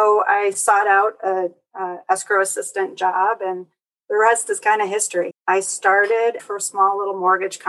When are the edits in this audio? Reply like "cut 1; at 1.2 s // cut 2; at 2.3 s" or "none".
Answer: cut 1; at 5.3 s // cut 2; at 6.4 s